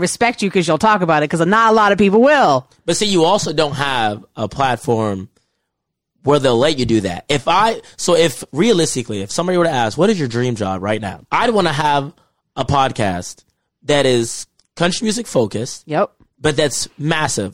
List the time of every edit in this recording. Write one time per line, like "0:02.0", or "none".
0:11.2